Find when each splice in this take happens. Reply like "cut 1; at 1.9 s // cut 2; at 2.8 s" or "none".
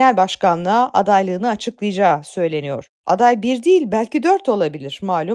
cut 1; at 3.0 s